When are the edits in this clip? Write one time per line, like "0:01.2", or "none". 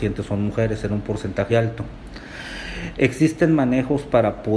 0:01.5